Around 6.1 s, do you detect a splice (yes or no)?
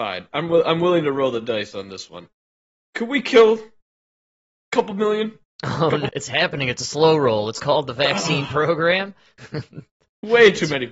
yes